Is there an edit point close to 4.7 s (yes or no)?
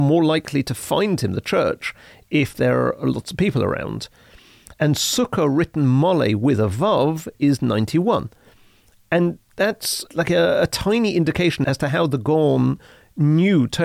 yes